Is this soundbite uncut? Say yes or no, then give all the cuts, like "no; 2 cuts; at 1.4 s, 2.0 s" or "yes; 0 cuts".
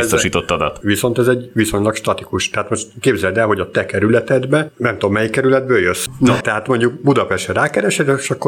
no; 1 cut; at 6.1 s